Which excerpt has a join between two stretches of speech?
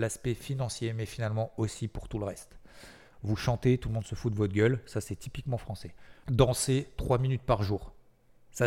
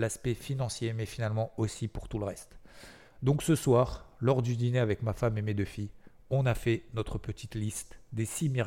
first; 2 cuts; at 3.1 s, 6.2 s

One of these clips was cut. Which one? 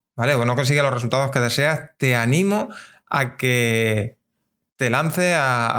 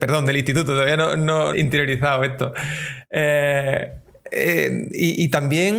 second; 1 cut; at 1.5 s

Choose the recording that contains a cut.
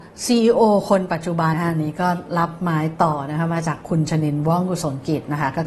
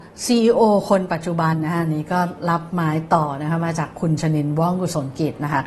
first; 1 cut; at 1.5 s

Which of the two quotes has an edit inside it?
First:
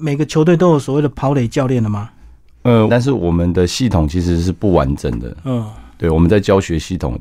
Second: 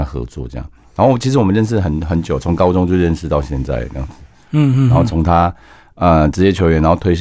first; 1 cut; at 2.9 s

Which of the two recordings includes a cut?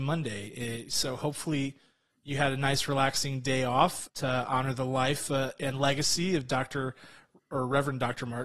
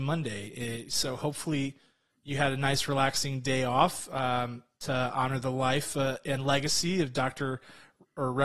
first; 1 cut; at 4.1 s

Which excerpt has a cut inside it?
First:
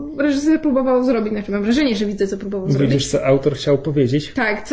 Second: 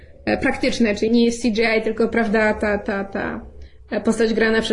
second; 1 cut; at 1.1 s

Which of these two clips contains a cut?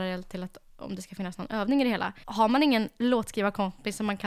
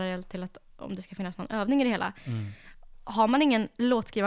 first; 1 cut; at 2.2 s

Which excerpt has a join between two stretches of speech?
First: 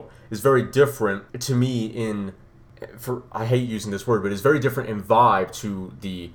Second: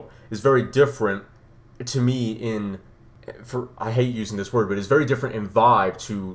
first; 1 cut; at 1.3 s

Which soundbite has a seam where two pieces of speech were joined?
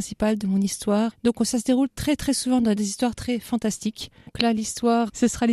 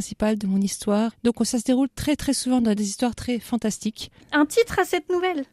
second; 1 cut; at 4.2 s

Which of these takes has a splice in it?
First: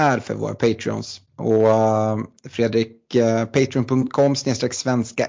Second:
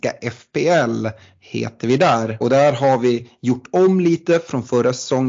second; 1 cut; at 2.4 s

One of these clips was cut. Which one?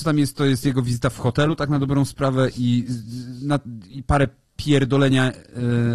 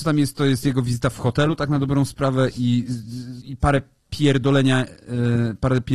second; 1 cut; at 3.4 s

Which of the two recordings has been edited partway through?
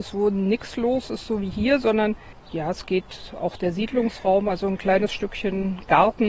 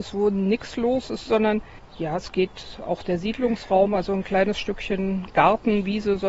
second; 1 cut; at 1.3 s

